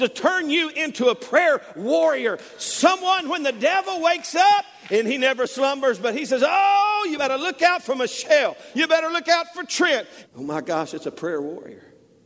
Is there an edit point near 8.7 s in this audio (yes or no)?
yes